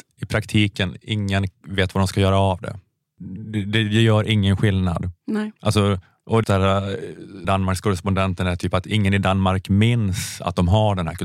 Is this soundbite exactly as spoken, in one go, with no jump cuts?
no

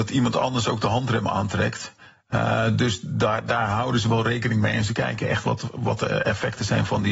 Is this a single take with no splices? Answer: yes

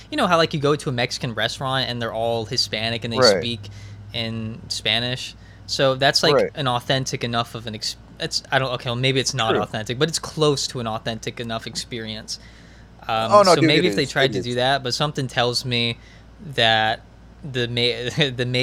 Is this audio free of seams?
no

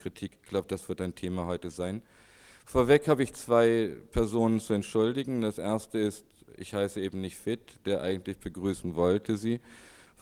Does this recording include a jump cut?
no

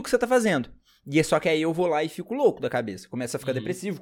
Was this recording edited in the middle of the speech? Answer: no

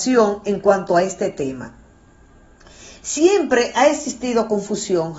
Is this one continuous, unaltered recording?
yes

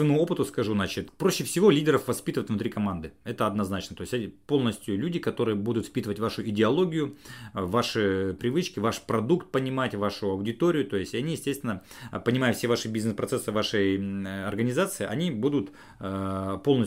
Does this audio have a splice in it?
no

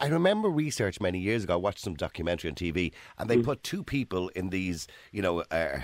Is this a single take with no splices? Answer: yes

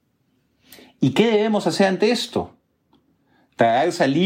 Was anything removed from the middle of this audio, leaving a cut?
no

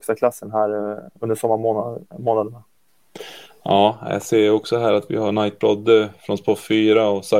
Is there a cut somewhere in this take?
yes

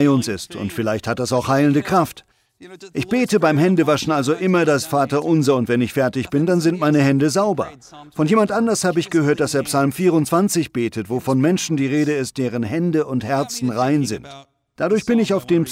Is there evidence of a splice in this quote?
no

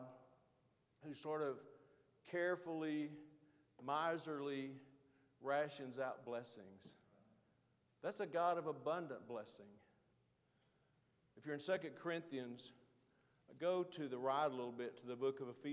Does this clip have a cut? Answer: no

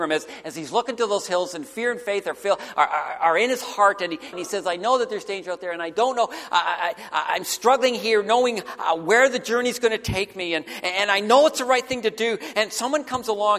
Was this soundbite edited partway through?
yes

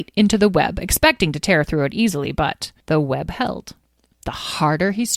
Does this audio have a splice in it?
yes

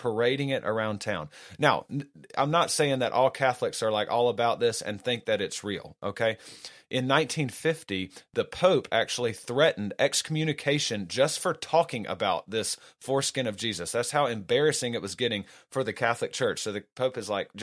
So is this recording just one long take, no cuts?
yes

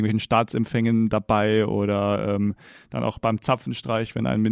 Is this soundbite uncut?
yes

